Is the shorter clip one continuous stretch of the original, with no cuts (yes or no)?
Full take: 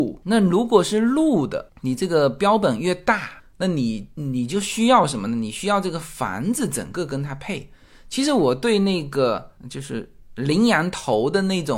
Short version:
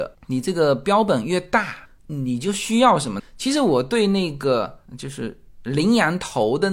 no